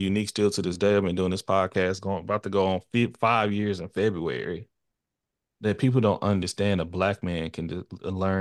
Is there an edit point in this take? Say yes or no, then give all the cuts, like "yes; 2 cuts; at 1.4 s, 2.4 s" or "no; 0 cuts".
no; 0 cuts